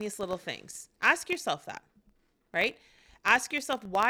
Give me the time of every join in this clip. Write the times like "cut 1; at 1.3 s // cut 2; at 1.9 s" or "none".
cut 1; at 0.9 s